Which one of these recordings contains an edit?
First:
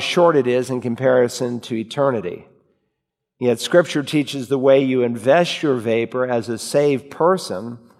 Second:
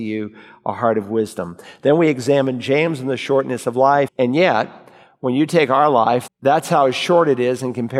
second; 2 cuts; at 4.1 s, 6.3 s

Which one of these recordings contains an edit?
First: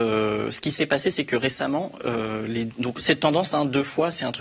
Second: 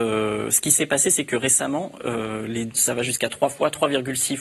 second; 1 cut; at 2.7 s

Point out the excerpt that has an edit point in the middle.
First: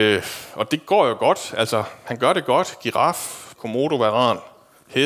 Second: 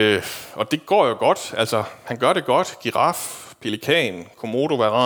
first; 1 cut; at 3.6 s

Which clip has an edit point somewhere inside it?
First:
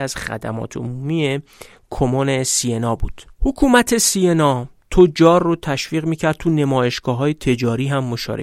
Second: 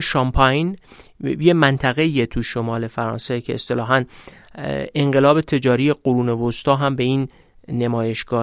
first; 1 cut; at 3.3 s

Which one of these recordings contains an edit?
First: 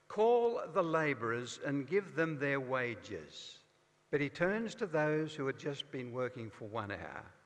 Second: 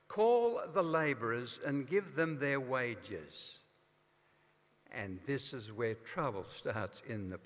first; 1 cut; at 4.1 s

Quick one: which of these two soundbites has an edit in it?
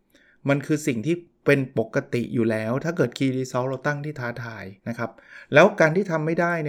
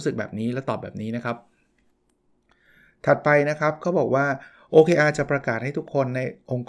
first; 1 cut; at 4.8 s

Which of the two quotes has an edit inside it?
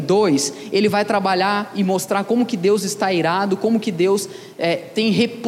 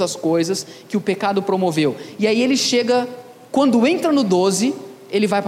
second; 1 cut; at 3.5 s

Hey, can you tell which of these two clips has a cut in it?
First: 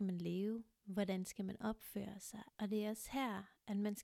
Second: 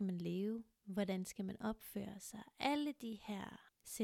first; 1 cut; at 2.5 s

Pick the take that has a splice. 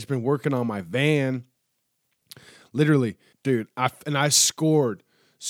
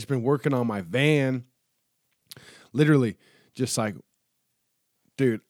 first; 1 cut; at 3.3 s

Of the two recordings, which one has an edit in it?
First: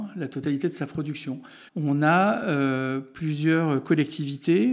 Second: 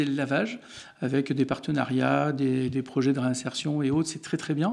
first; 1 cut; at 1.7 s

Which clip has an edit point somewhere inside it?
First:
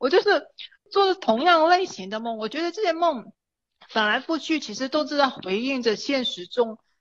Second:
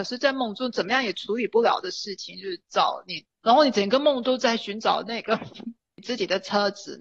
second; 1 cut; at 3.4 s

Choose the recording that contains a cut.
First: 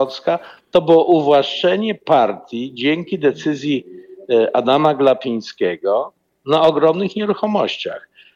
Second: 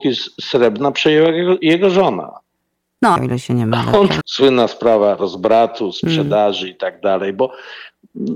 second; 2 cuts; at 3.2 s, 4.2 s

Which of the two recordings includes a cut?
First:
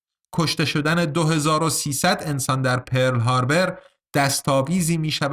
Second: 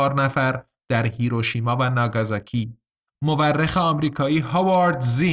second; 1 cut; at 3.1 s

